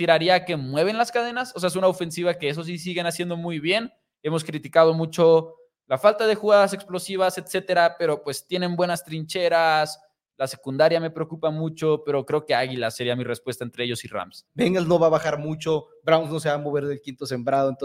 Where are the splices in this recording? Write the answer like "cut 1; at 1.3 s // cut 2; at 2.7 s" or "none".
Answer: cut 1; at 14.5 s